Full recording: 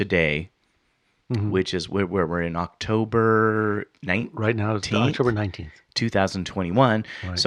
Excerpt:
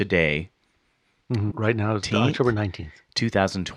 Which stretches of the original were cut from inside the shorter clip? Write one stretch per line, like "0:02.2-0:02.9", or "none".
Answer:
0:01.5-0:04.3